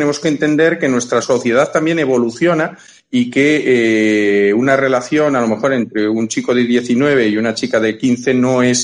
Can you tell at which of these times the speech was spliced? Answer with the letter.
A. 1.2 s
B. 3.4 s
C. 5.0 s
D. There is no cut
A